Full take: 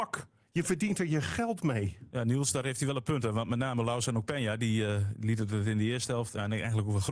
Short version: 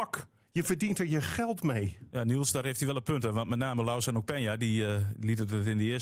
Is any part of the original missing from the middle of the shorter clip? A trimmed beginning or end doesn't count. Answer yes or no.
no